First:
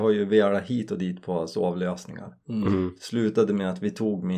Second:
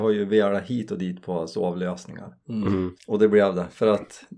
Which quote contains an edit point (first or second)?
second